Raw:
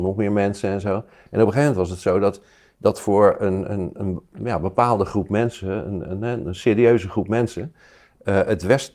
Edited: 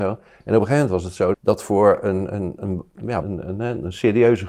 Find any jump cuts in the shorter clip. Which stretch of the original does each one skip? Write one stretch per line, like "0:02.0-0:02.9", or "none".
0:02.2-0:02.7
0:04.6-0:05.8